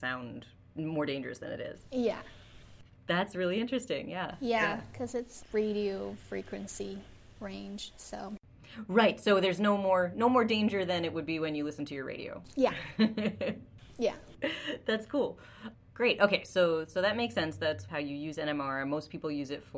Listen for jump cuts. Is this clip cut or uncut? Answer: uncut